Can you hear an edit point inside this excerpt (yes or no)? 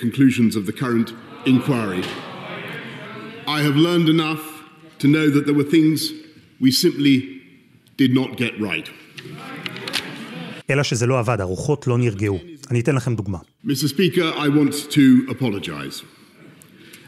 yes